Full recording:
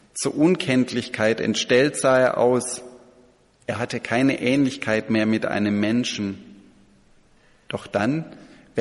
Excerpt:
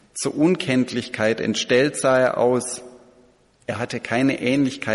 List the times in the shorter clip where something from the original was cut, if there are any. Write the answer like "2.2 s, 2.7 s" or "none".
none